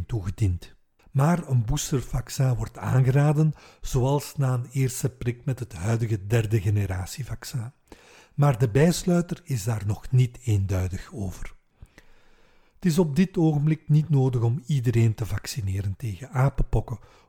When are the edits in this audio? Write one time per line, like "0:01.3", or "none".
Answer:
0:01.0